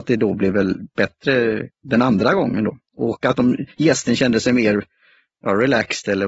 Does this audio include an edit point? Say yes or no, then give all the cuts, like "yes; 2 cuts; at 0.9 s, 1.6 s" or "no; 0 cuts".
yes; 1 cut; at 1.7 s